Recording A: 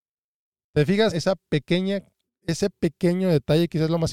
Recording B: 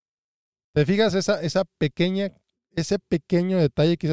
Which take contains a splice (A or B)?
A